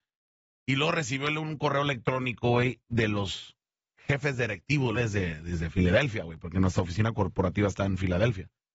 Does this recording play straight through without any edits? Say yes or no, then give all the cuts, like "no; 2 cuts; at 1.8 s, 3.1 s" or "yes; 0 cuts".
no; 1 cut; at 5.0 s